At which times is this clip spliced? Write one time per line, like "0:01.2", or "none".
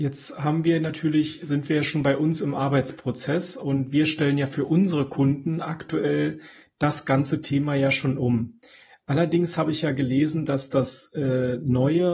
none